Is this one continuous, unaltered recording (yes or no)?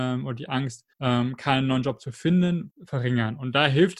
no